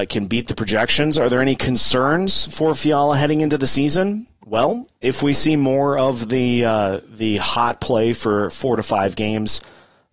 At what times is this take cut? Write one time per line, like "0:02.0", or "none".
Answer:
none